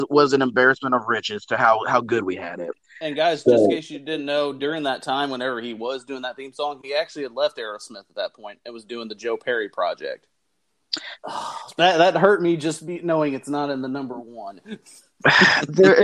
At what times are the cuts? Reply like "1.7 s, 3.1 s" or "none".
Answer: 11.2 s